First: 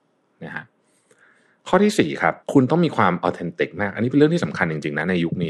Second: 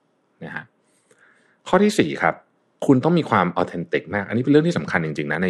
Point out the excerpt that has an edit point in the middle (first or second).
first